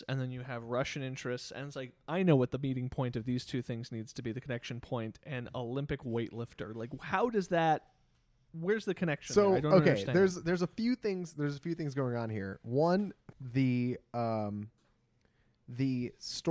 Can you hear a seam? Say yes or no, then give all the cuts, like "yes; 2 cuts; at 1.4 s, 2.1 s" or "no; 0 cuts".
yes; 1 cut; at 13.3 s